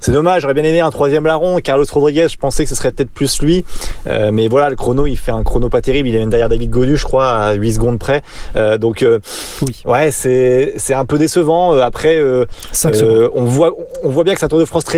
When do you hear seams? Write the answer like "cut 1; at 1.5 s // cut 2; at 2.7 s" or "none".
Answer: none